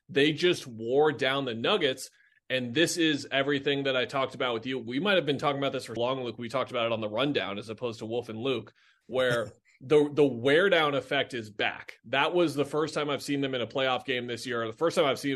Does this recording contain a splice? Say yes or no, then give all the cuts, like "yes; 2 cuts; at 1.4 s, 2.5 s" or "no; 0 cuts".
yes; 1 cut; at 6.0 s